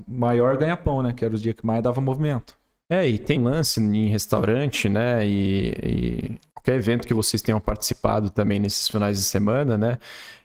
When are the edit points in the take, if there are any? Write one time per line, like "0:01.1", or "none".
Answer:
0:03.4
0:06.5